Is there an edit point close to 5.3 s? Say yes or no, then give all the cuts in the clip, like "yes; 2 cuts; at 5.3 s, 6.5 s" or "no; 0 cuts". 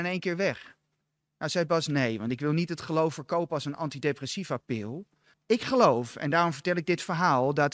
yes; 1 cut; at 5.3 s